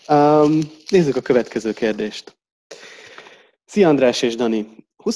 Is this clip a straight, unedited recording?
yes; 0 cuts

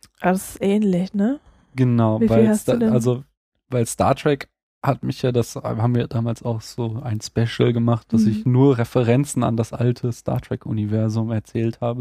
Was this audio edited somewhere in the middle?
no; 0 cuts

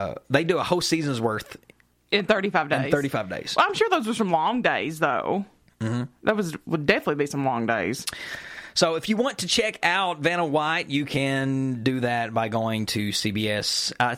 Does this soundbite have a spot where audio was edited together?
no; 0 cuts

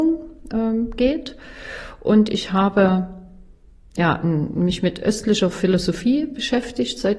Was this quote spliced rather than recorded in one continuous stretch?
no; 0 cuts

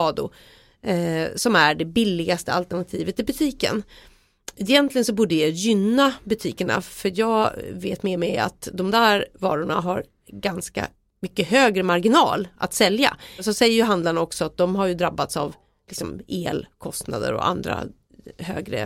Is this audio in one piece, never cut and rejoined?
yes; 0 cuts

